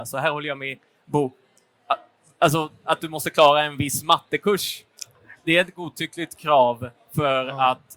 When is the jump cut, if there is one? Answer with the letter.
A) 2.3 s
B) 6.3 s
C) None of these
C